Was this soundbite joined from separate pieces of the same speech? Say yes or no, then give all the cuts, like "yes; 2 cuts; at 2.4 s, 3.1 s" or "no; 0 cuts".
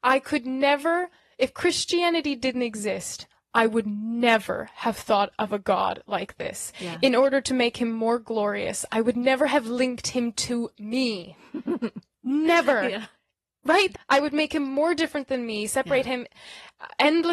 yes; 1 cut; at 13.9 s